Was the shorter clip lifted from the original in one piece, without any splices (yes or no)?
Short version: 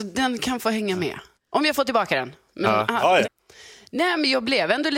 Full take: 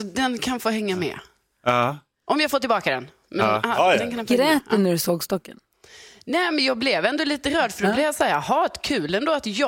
no